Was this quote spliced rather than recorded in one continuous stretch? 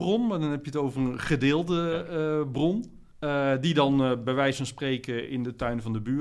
yes; 1 cut; at 3.1 s

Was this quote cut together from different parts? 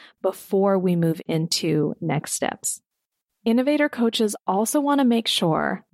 no; 0 cuts

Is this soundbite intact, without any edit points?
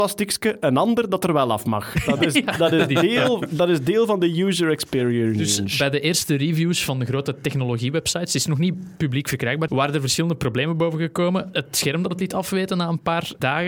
no; 1 cut; at 9.7 s

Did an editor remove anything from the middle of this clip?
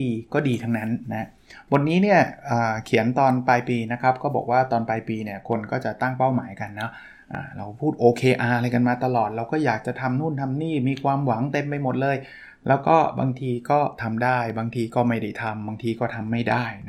no; 0 cuts

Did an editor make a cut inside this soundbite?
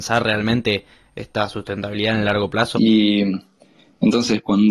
yes; 1 cut; at 2.7 s

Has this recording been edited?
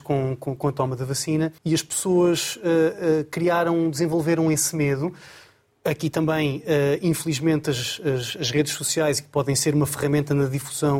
yes; 1 cut; at 1.6 s

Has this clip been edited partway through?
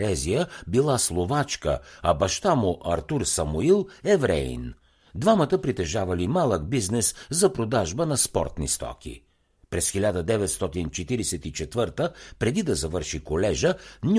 no; 0 cuts

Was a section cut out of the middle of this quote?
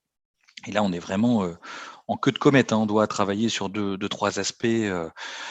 no; 0 cuts

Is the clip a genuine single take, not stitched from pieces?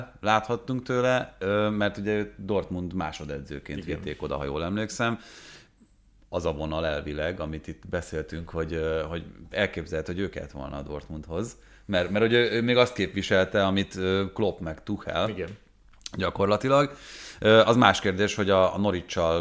yes; 0 cuts

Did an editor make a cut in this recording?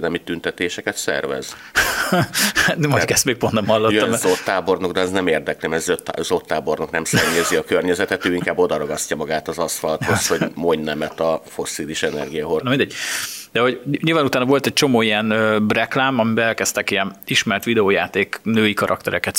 yes; 1 cut; at 12.6 s

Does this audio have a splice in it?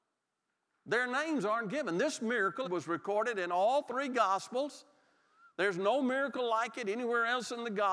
yes; 1 cut; at 2.6 s

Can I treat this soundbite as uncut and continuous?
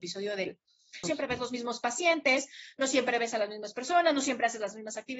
no; 1 cut; at 1.0 s

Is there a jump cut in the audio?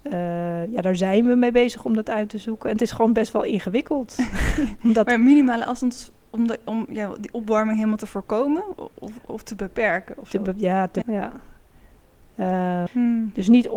yes; 3 cuts; at 8.8 s, 11.0 s, 12.9 s

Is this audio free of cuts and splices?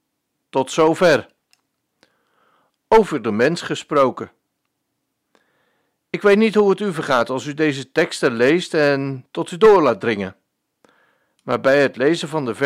yes; 0 cuts

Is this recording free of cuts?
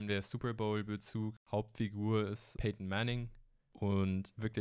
no; 1 cut; at 3.7 s

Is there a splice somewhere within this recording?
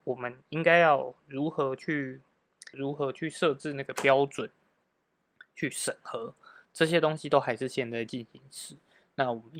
yes; 1 cut; at 2.7 s

